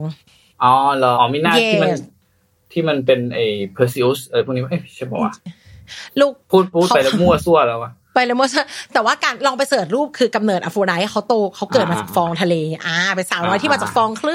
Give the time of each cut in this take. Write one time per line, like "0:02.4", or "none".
0:01.1